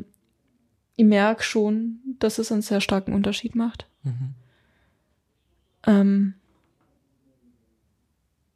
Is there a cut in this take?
no; 0 cuts

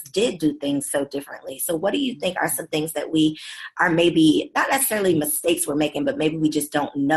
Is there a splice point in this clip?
no; 0 cuts

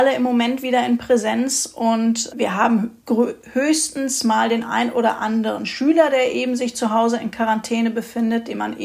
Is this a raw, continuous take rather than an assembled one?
no; 1 cut; at 2.3 s

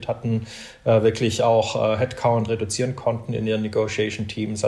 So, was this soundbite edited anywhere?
no; 0 cuts

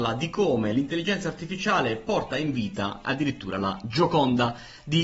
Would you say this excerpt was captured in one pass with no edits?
no; 1 cut; at 3.0 s

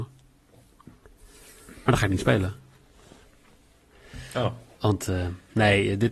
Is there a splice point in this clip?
no; 0 cuts

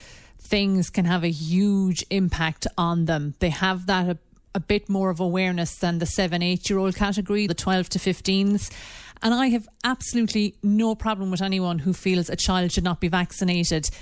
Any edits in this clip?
yes; 2 cuts; at 7.5 s, 9.2 s

